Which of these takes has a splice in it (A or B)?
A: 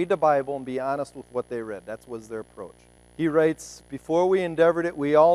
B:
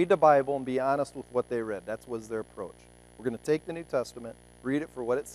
A